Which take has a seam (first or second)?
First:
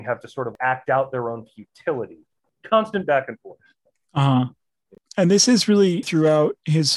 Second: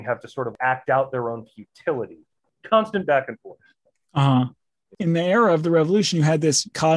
second